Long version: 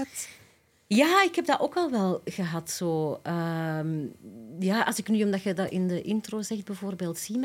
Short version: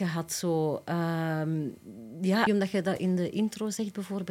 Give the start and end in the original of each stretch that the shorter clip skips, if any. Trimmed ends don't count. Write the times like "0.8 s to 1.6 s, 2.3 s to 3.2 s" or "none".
4.8 s to 5.2 s

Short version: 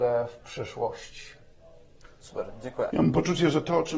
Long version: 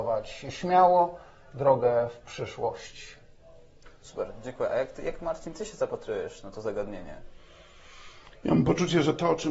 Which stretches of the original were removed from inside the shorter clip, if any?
4.7 s to 8.4 s

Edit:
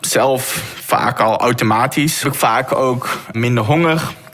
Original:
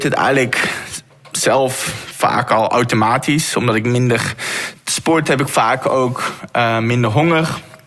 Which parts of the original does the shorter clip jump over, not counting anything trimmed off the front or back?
3.5 s to 5.4 s, 6.5 s to 6.8 s

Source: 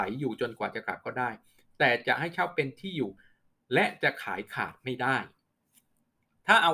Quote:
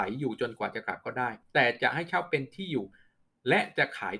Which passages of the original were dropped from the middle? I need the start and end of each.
1.4 s to 1.7 s

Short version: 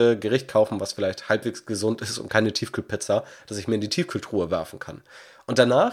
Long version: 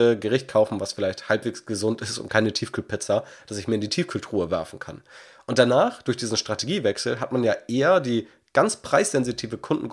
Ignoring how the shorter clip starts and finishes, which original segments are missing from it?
none

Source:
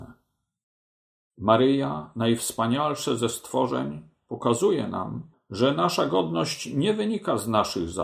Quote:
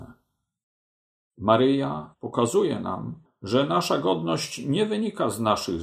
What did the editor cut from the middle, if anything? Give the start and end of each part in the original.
2.1 s to 4.2 s

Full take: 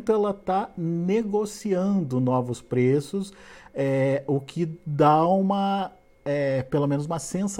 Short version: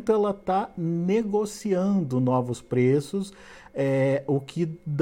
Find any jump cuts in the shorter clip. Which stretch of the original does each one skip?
none

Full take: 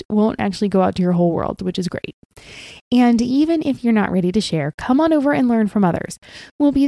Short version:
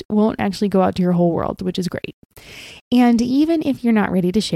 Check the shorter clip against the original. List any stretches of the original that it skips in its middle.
none

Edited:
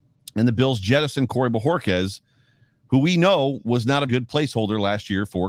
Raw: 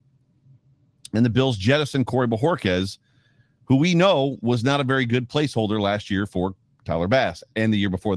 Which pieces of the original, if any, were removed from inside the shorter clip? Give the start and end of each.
4.8 s to 5.1 s

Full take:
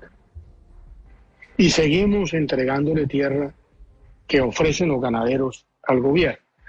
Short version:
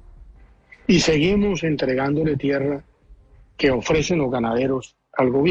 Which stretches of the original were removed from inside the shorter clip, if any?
none

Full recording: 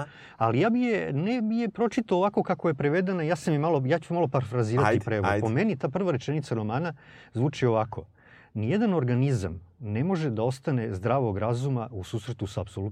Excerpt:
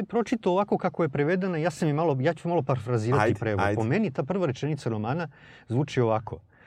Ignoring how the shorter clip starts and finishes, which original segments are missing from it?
none

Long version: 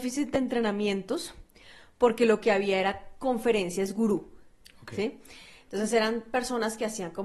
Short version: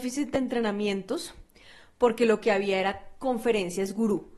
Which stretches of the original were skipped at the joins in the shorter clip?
none

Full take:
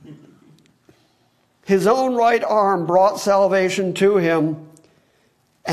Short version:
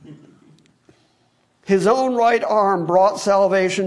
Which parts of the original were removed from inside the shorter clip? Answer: none

